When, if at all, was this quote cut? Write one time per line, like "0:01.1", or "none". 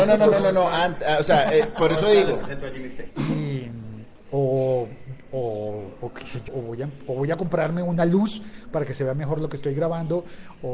0:03.1
0:06.5